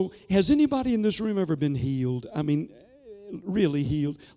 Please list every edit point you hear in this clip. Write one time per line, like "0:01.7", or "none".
none

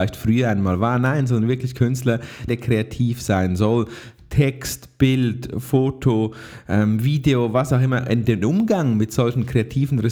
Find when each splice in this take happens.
0:02.5

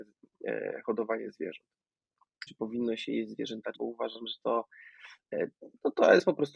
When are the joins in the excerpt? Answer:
0:02.5
0:03.7

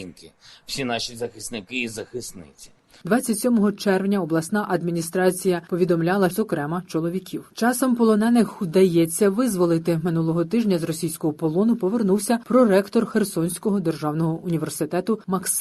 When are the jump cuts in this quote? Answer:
0:03.0
0:06.3

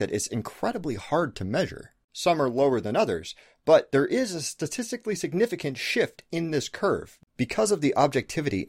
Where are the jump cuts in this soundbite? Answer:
0:02.1
0:07.2

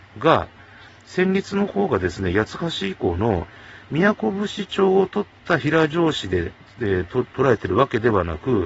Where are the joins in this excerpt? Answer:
none

